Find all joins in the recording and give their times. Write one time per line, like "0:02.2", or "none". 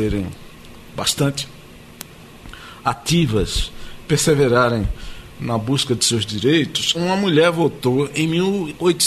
0:06.9